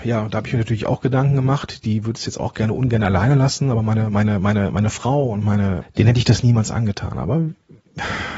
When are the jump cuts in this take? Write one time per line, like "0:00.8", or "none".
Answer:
0:05.8